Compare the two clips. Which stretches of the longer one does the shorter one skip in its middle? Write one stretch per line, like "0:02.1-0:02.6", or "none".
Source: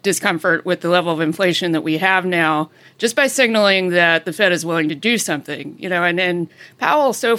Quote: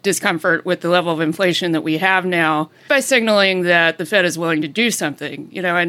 0:02.9-0:03.1